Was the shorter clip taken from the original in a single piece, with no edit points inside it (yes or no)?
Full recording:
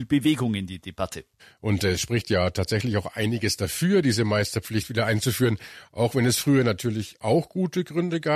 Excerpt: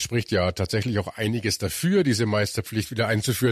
yes